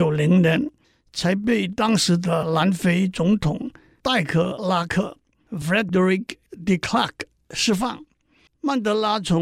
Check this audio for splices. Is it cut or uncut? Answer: cut